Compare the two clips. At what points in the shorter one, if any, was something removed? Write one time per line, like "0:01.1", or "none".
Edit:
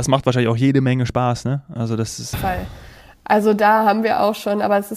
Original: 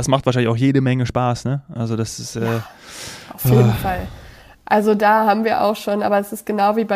0:02.3